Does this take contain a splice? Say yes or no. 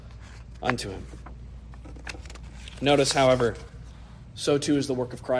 yes